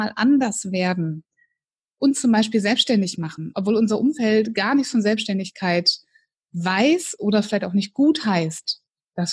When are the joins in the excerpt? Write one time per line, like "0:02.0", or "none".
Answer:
none